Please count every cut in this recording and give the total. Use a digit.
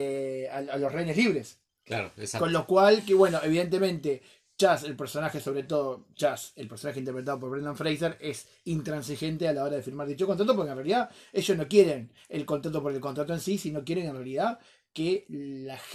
0